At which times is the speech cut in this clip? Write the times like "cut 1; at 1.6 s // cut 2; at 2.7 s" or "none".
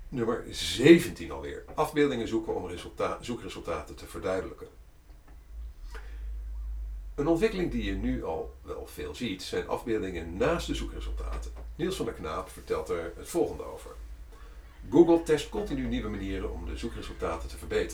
none